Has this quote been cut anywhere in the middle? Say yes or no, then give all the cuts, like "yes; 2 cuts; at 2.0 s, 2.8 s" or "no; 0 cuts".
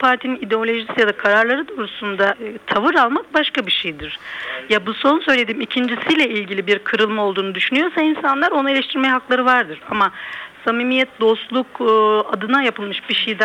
no; 0 cuts